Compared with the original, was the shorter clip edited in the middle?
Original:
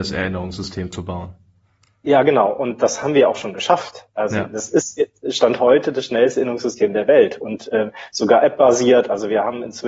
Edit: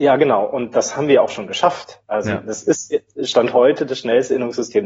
no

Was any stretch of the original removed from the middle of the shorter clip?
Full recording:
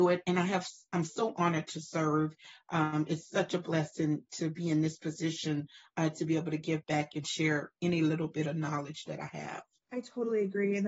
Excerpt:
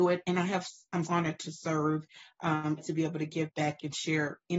yes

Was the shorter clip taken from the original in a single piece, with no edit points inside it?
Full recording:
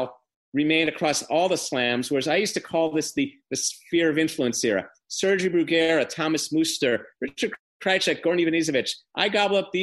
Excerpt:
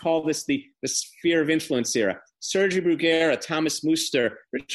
yes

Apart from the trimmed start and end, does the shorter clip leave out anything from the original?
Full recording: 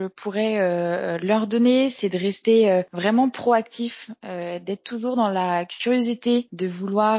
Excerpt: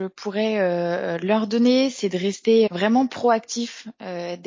yes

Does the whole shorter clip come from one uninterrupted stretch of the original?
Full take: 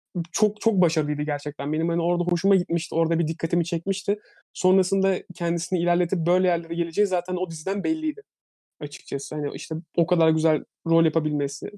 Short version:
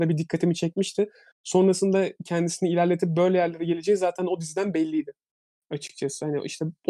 yes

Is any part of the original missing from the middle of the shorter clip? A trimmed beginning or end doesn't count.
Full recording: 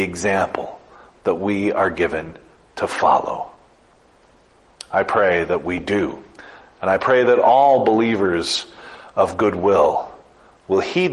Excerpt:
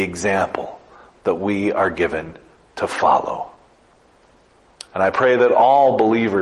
yes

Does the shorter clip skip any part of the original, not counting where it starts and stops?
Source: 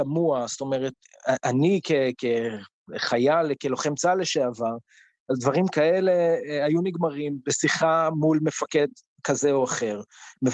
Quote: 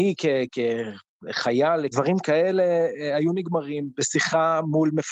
yes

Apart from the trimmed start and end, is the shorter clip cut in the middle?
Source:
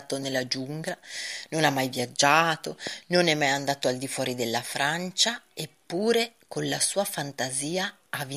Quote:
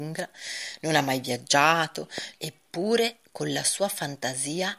yes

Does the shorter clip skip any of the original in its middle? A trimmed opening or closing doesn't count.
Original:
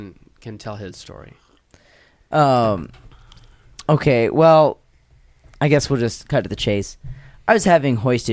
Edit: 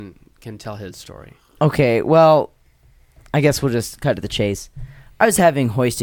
yes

